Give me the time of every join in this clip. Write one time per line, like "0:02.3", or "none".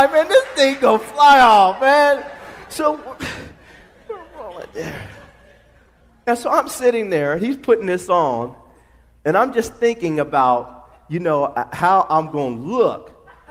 none